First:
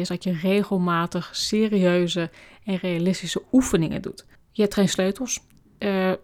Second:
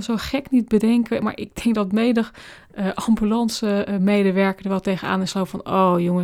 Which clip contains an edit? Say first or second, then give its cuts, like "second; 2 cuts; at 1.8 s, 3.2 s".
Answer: first; 1 cut; at 4.3 s